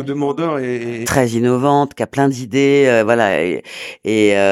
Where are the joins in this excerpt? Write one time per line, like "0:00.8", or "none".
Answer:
0:01.0